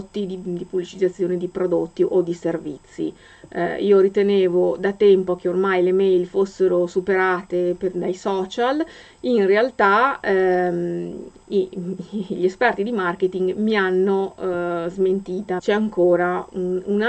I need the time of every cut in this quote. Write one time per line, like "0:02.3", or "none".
0:15.6